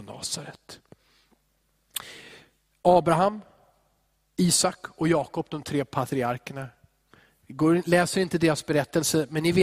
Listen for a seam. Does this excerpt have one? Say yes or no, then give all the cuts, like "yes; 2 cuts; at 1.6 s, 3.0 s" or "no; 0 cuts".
no; 0 cuts